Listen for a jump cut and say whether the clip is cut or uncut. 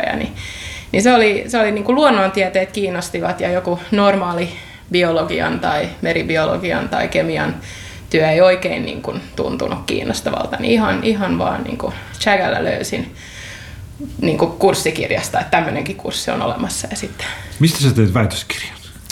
uncut